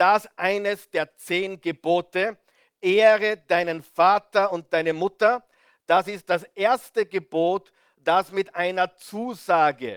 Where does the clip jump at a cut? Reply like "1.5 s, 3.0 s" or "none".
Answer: none